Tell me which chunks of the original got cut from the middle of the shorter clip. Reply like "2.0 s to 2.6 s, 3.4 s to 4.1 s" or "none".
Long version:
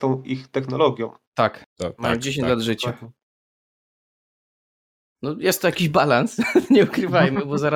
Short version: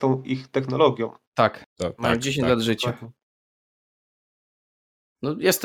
none